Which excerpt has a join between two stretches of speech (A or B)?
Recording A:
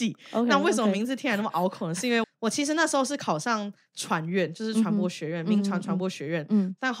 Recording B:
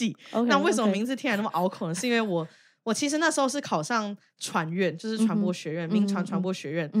A